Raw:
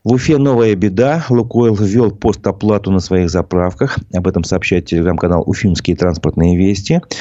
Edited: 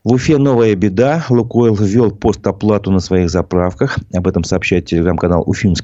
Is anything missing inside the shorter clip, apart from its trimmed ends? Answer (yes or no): no